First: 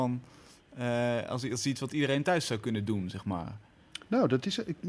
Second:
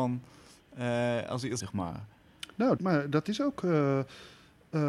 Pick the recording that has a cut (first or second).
second